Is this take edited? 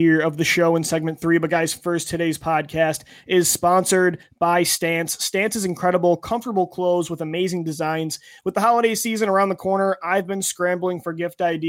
no; 0 cuts

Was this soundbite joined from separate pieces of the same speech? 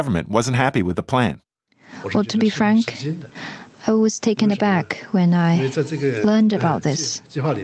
no; 0 cuts

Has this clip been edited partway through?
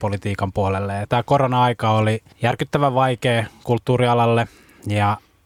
yes; 2 cuts; at 1.0 s, 2.3 s

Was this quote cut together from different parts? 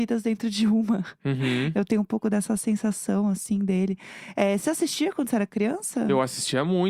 no; 0 cuts

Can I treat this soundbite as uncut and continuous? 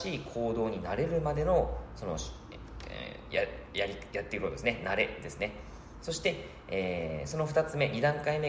yes; 0 cuts

